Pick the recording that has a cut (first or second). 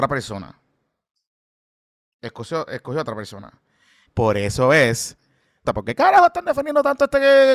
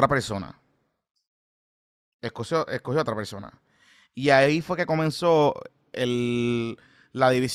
first